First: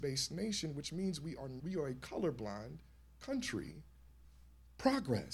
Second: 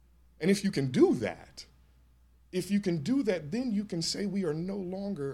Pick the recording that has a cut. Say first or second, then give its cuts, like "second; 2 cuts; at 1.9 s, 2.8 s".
first; 1 cut; at 1.6 s